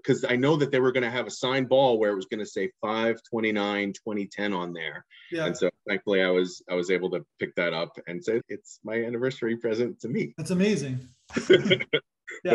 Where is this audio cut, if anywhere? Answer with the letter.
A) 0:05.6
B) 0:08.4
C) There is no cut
B